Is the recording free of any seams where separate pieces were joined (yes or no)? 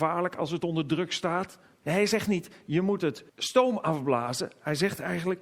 no